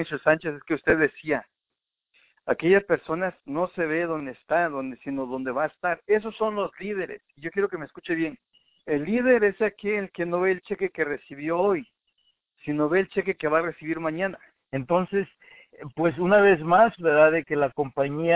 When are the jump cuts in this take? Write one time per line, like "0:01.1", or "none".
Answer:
0:14.6
0:17.0